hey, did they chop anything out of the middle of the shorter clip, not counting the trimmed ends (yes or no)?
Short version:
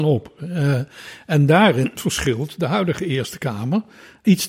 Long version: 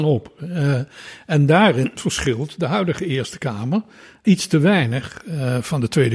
no